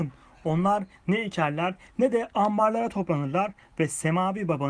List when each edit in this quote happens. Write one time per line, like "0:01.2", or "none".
0:01.9